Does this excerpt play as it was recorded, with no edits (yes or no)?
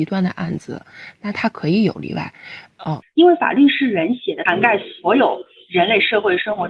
no